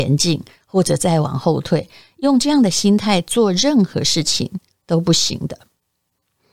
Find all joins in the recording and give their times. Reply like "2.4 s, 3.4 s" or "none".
none